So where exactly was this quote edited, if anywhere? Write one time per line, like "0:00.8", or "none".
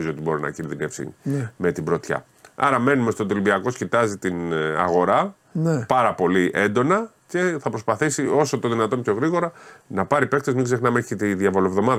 0:07.2